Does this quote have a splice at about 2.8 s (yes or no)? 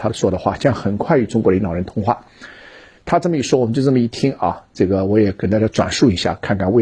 no